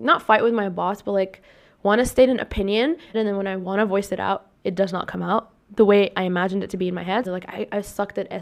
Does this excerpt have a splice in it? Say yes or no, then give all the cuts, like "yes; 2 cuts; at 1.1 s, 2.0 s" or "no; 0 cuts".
yes; 2 cuts; at 3.1 s, 7.2 s